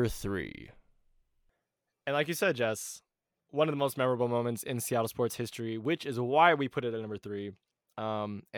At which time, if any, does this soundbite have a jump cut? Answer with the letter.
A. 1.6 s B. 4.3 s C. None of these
C